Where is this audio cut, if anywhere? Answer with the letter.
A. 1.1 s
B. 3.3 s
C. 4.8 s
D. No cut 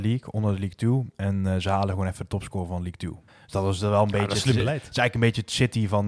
B